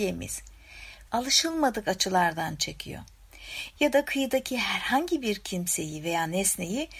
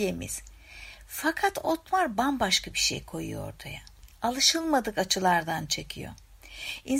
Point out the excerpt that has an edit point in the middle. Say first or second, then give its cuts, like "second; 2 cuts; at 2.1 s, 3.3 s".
first; 2 cuts; at 1.1 s, 3.7 s